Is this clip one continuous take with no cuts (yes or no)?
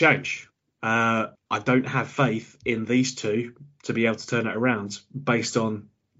no